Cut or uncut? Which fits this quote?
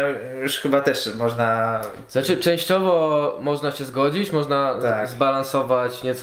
uncut